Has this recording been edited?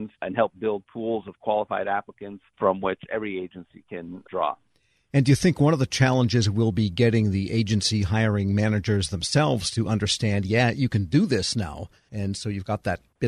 no; 0 cuts

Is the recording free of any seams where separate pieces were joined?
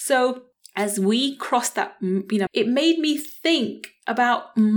no; 1 cut; at 2.5 s

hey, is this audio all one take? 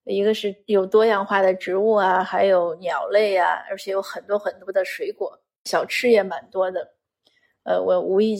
yes; 0 cuts

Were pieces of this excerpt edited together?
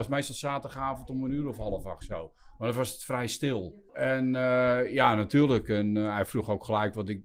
yes; 1 cut; at 3.9 s

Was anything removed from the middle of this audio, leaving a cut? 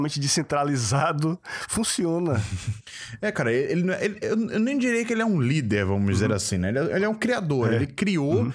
no; 0 cuts

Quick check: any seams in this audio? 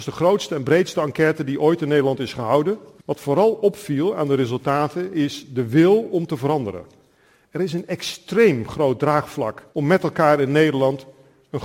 yes; 2 cuts; at 3.0 s, 9.7 s

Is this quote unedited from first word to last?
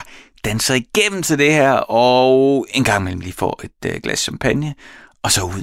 yes; 0 cuts

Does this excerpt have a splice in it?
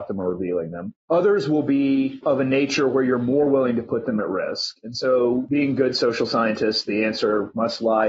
no; 0 cuts

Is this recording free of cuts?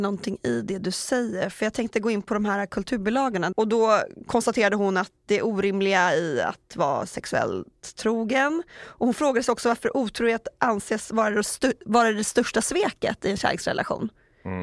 no; 1 cut; at 3.5 s

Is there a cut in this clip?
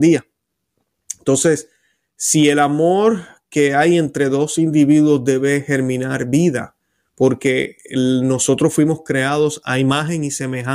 no; 0 cuts

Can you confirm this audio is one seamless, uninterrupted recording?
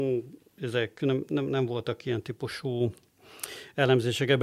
yes; 0 cuts

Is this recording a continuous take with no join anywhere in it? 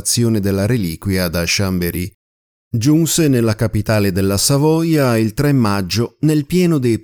yes; 0 cuts

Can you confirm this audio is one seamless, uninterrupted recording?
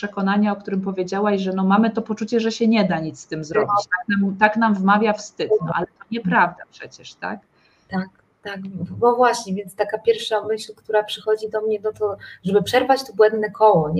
yes; 0 cuts

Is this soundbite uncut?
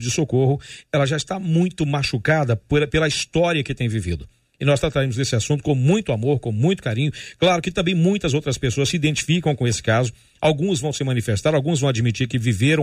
yes; 0 cuts

